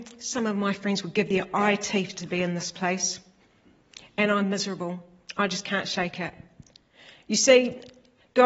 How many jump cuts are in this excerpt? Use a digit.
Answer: 0